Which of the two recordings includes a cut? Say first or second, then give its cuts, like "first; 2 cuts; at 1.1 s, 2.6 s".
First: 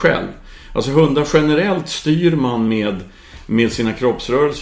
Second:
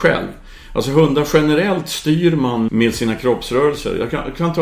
second; 1 cut; at 2.7 s